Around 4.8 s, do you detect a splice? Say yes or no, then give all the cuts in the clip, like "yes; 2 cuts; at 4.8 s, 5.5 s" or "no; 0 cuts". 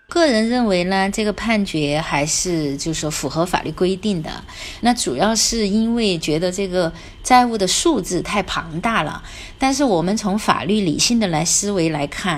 yes; 1 cut; at 4.8 s